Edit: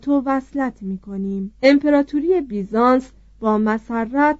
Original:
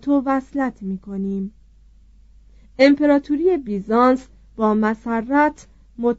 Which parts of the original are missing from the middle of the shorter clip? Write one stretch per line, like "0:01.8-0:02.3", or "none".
0:01.5-0:02.7

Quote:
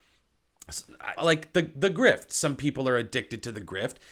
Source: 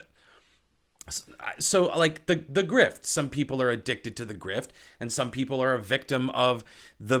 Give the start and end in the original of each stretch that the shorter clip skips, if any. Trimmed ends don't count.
0:01.6-0:01.9

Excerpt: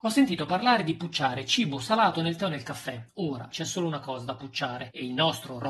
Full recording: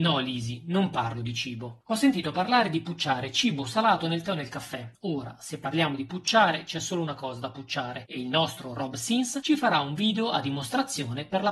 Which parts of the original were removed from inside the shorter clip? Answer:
0:05.4-0:06.7

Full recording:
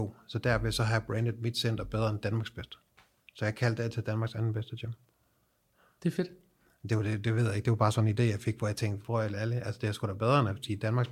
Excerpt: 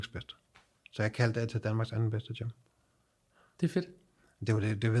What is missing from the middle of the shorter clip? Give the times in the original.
none

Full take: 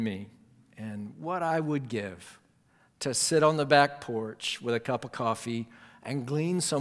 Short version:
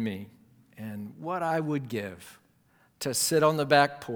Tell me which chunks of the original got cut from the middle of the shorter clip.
none

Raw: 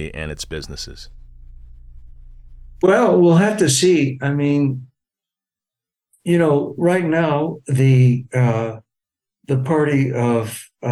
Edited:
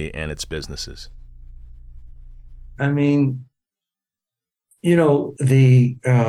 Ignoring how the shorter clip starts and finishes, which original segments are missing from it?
0:02.8-0:04.2
0:06.7-0:07.6

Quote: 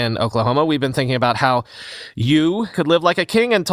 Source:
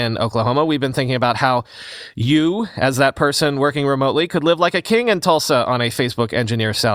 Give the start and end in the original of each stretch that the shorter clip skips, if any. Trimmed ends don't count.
0:02.7-0:04.3

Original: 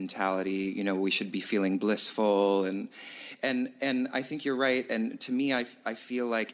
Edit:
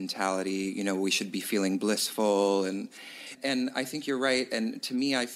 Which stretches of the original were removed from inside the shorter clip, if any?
0:03.4-0:03.7

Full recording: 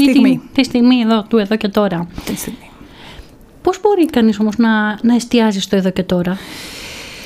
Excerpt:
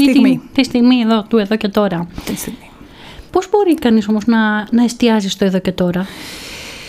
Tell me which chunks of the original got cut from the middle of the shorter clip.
0:03.3-0:03.6

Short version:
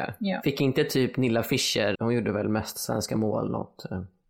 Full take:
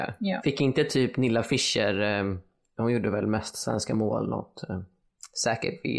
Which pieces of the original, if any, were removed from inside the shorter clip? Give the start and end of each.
0:02.0-0:02.7

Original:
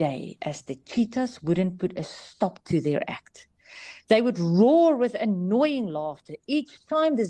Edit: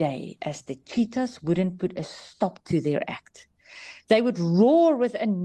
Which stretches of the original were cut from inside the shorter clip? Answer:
none

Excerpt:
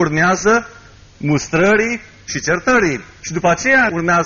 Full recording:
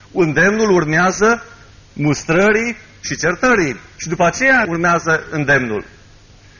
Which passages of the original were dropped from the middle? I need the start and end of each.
none

